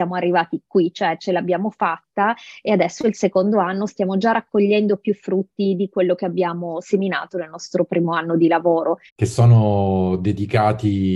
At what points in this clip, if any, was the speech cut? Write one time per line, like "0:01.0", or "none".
0:09.1